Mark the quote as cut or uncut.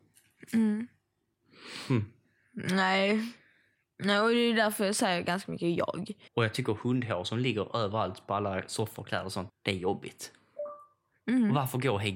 cut